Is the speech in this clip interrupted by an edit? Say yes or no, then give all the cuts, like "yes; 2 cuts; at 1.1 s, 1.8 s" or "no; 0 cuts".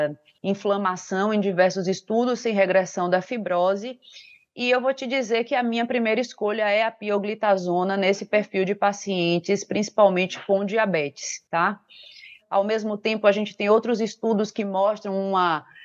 yes; 1 cut; at 12.4 s